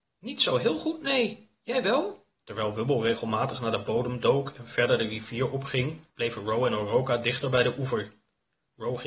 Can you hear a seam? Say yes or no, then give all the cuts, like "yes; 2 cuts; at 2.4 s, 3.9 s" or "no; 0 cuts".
yes; 2 cuts; at 2.4 s, 6.1 s